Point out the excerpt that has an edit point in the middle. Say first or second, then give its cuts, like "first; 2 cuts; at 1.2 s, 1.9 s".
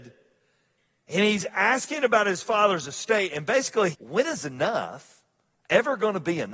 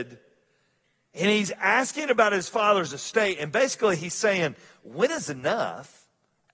first; 1 cut; at 3.9 s